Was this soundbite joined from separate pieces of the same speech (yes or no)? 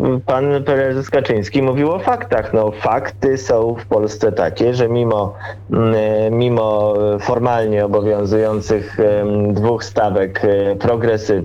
no